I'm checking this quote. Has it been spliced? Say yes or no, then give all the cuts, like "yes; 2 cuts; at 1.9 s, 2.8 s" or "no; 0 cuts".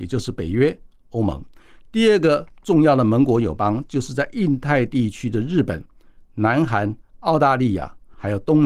no; 0 cuts